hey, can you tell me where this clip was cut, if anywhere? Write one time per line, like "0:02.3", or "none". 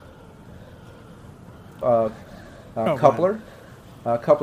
0:01.8